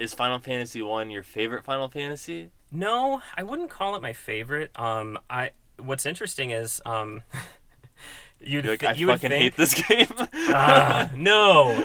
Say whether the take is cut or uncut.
cut